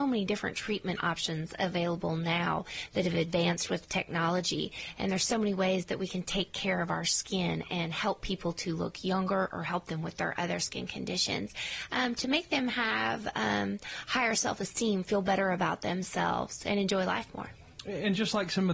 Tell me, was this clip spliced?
no; 0 cuts

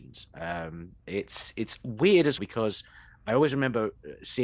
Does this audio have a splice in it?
yes; 2 cuts; at 1.0 s, 2.4 s

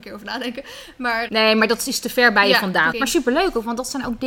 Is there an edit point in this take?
yes; 2 cuts; at 1.3 s, 2.9 s

